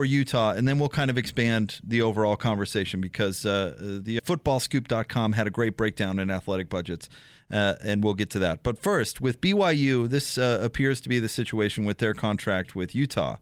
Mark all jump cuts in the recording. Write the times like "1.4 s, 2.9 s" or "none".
4.2 s

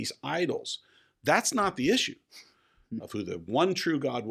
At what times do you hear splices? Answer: 3.0 s

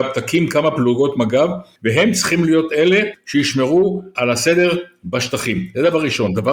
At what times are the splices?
4.2 s

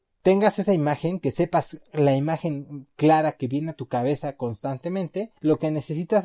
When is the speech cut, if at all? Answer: 5.4 s

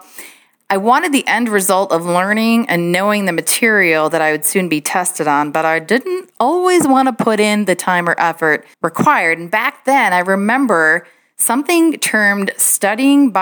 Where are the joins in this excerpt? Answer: 8.7 s

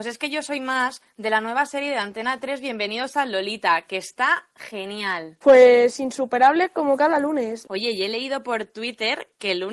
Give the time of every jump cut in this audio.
5.4 s, 7.6 s

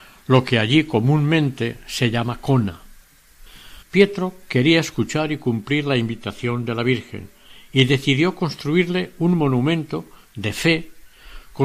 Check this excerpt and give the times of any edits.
3.8 s

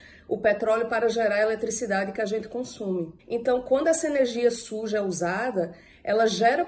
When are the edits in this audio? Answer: 3.2 s

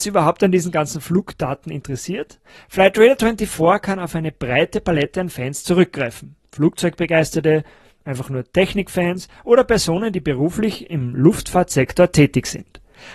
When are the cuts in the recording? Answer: none

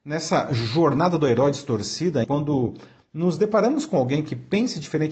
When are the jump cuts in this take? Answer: 2.2 s

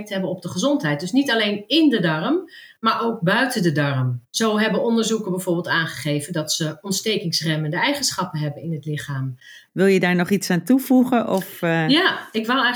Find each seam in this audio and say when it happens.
4.3 s, 9.7 s

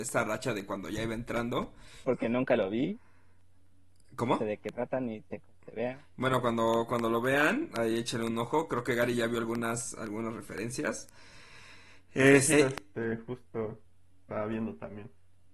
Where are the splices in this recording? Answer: 2.0 s, 12.5 s

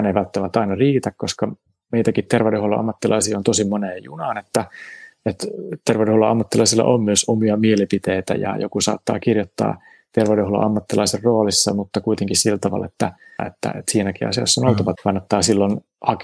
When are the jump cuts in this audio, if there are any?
13.4 s, 15.0 s

